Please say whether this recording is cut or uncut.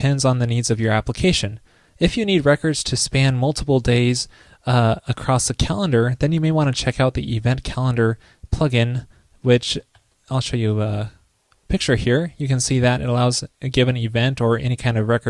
uncut